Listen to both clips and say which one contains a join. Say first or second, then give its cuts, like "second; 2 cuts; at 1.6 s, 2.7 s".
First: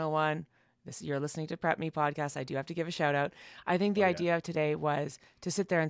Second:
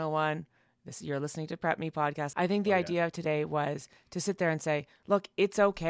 second; 1 cut; at 2.3 s